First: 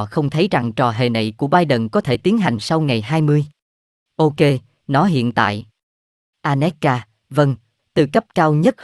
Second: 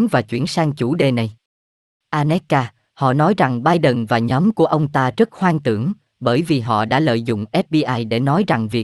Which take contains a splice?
first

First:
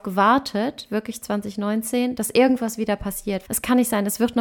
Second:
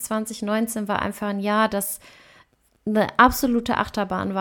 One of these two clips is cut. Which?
first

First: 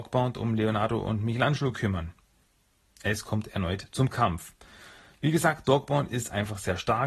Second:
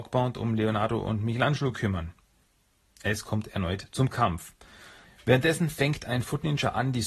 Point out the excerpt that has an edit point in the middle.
second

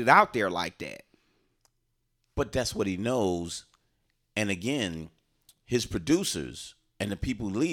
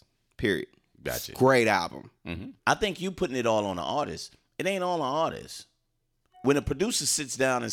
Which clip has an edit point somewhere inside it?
second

